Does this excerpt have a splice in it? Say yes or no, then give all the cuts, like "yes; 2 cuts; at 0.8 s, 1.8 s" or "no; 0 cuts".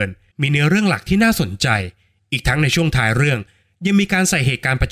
no; 0 cuts